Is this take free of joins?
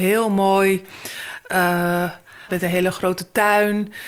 no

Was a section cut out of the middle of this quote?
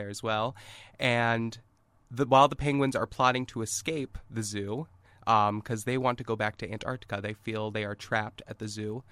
no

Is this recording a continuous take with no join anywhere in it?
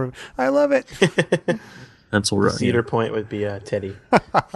yes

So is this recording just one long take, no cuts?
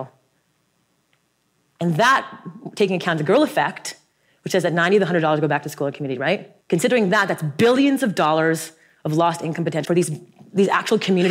no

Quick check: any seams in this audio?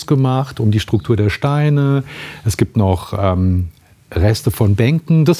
no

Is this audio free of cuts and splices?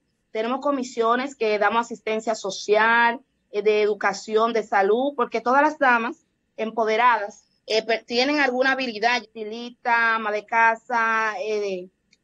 no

